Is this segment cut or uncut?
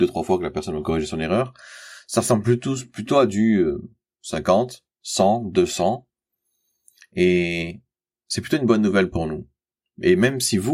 uncut